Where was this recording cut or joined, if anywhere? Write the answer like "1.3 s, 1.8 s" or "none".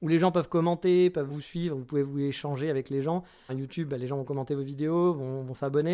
1.3 s, 3.5 s